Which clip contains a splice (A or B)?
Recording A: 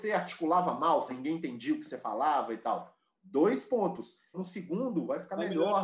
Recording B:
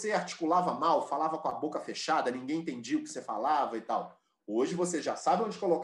A